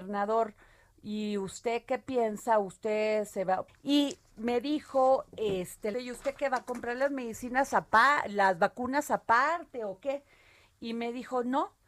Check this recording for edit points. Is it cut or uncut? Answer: cut